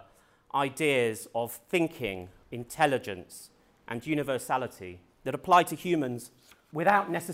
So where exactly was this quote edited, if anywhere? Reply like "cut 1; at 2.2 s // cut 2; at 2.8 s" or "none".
cut 1; at 2.4 s // cut 2; at 5.1 s